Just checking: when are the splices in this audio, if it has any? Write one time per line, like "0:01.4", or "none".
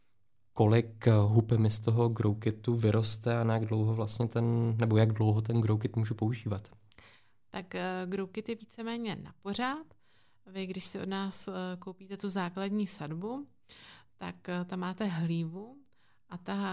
none